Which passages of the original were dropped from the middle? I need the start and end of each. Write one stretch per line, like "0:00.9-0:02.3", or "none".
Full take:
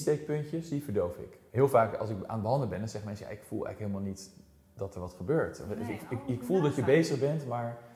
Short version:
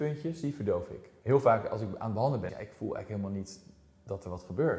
0:02.8-0:03.2

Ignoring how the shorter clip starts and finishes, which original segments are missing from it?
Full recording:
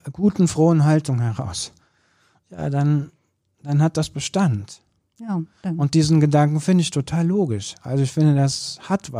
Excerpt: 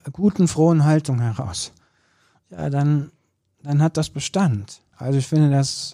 0:04.9-0:07.8

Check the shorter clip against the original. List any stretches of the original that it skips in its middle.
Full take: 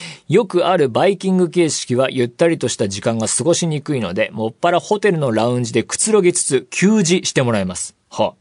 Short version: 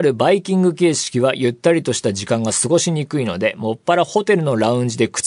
none

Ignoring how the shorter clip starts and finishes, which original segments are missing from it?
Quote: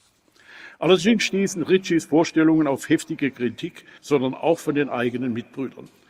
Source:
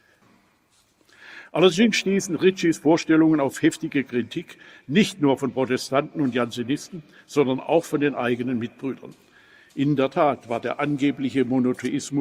0:04.7-0:07.2

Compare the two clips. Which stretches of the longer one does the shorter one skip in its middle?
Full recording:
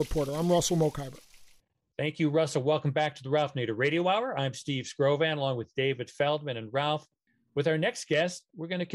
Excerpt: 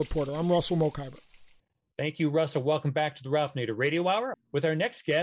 0:04.3-0:07.4

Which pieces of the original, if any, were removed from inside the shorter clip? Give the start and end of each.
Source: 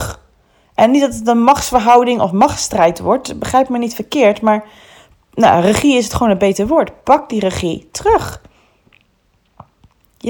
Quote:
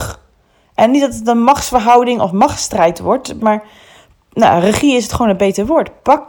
0:03.4-0:04.4

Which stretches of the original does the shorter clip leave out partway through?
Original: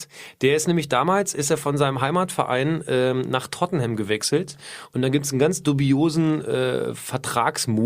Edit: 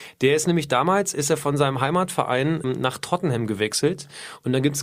0:02.8-0:03.1

